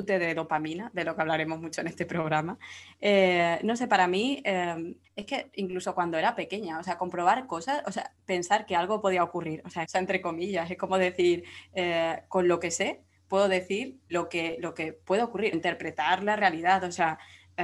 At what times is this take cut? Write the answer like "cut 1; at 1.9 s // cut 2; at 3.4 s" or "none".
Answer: cut 1; at 5.0 s // cut 2; at 9.9 s // cut 3; at 15.5 s